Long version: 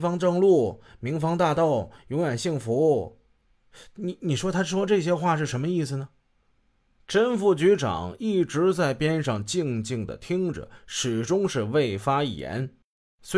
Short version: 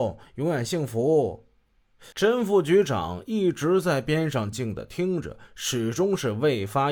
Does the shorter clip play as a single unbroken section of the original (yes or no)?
no